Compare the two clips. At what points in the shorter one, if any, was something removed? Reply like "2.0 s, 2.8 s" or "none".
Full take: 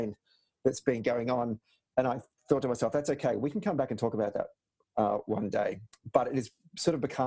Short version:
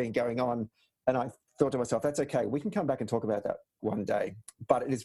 3.8 s

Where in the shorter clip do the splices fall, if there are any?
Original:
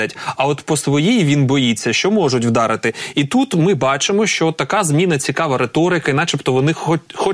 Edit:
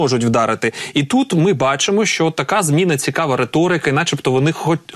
none

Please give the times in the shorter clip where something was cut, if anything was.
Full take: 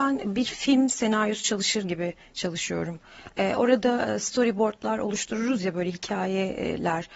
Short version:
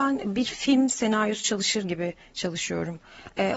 none

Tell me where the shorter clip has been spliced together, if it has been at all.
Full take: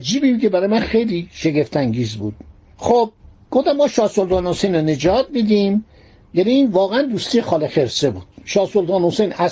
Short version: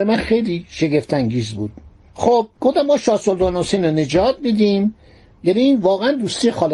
2.5 s

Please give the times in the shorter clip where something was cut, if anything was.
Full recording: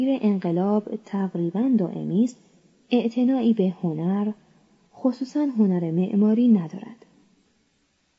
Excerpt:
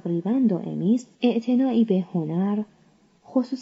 1.2 s

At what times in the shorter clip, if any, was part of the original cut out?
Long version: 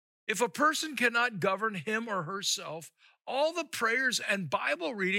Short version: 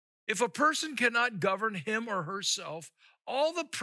none

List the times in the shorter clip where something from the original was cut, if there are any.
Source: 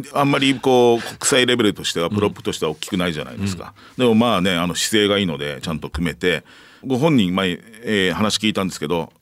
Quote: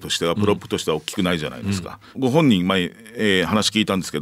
2.1 s

